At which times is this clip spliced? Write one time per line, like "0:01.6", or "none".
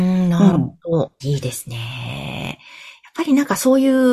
0:01.2

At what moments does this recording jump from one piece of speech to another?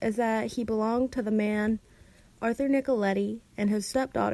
none

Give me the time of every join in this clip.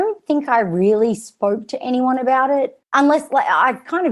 0:02.8

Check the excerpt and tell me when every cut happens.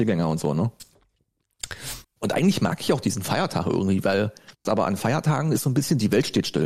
0:02.0
0:04.6

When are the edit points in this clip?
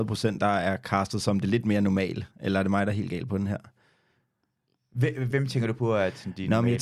0:05.3

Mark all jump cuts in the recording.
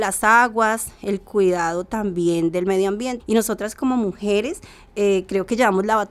0:03.2

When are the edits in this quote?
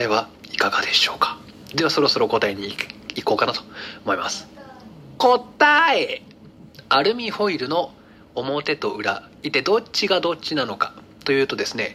none

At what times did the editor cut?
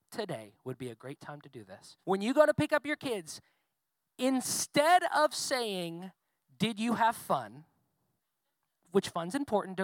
0:02.0

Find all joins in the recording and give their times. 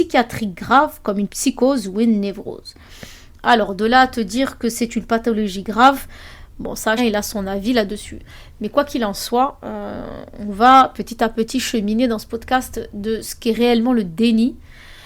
0:07.0

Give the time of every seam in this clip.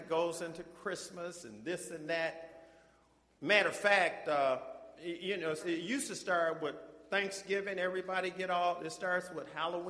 0:03.4
0:05.6

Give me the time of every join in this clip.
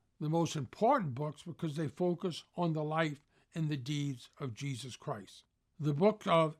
none

